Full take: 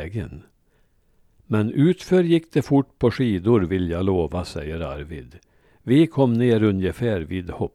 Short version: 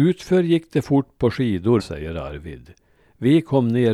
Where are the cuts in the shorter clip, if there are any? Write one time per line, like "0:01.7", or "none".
0:01.8